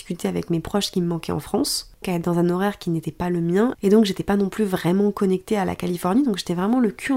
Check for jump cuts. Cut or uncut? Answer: cut